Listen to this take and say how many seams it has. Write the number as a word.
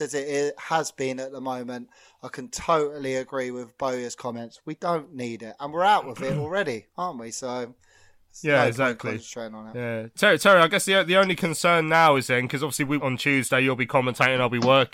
one